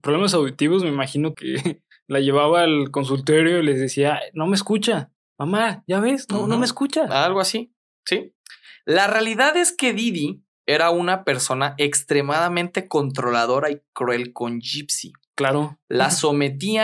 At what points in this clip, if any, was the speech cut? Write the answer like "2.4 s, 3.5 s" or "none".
1.3 s

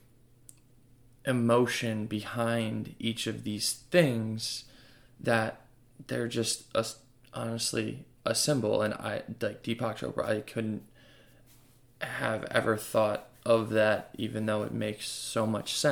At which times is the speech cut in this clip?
none

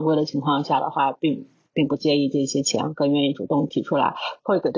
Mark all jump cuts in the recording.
none

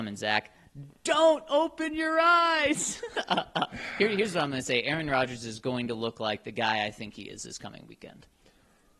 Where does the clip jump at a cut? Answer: none

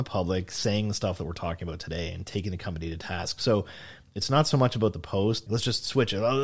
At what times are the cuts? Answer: 5.5 s

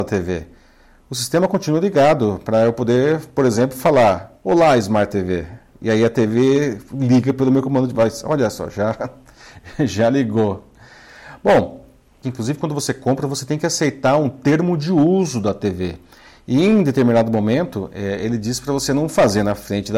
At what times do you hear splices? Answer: 12.2 s

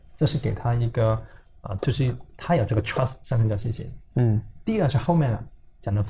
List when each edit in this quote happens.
1.8 s

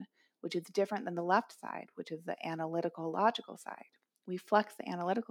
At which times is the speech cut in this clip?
none

